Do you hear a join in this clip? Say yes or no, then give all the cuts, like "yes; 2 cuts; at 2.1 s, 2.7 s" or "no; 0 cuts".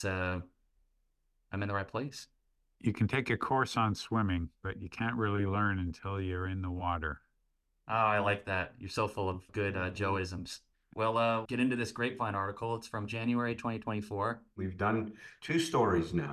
yes; 1 cut; at 11.5 s